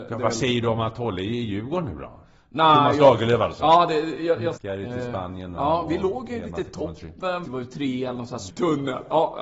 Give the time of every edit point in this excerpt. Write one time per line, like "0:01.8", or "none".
0:04.6
0:07.4
0:08.5